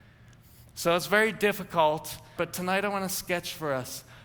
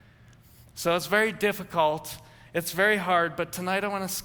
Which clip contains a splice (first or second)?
first